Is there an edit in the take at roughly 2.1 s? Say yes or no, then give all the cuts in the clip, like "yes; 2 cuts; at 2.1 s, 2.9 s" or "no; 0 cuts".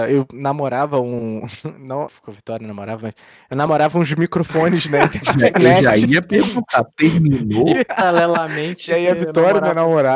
yes; 1 cut; at 2.1 s